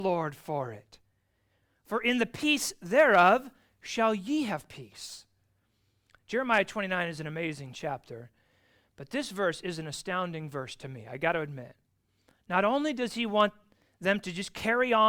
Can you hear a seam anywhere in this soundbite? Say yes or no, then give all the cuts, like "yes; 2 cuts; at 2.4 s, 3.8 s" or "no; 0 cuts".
no; 0 cuts